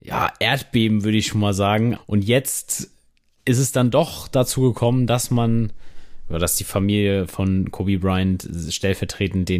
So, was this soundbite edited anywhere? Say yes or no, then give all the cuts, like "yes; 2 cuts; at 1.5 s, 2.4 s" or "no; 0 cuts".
yes; 1 cut; at 2.0 s